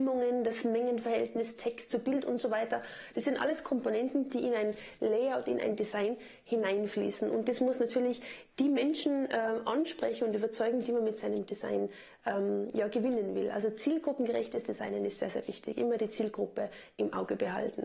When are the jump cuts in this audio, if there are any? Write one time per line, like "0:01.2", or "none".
none